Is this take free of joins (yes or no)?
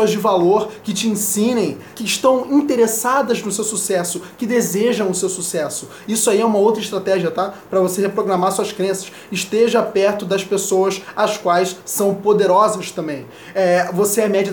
no